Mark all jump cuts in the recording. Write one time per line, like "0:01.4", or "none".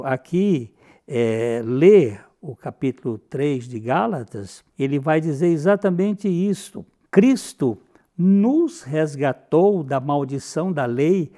0:04.7
0:07.1

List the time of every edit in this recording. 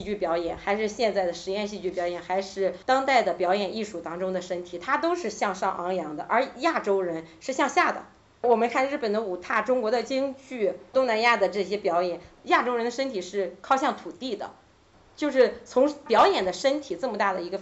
none

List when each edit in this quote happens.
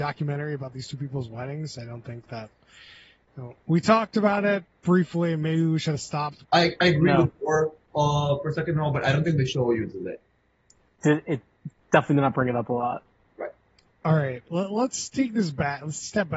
0:06.4

